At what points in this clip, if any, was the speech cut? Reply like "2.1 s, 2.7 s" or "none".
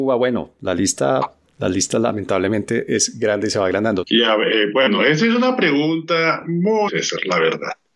4.0 s, 6.9 s